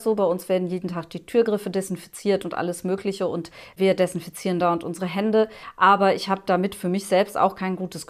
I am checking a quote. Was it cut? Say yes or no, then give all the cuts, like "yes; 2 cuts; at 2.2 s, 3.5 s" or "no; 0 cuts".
no; 0 cuts